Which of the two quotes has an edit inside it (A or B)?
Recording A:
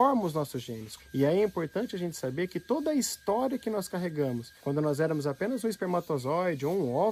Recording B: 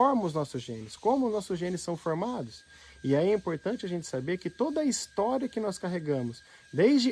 A